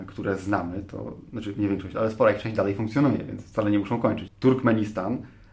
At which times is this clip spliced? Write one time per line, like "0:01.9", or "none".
0:04.3